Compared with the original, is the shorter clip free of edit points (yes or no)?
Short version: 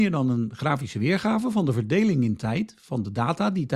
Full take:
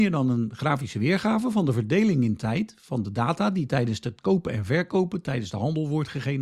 yes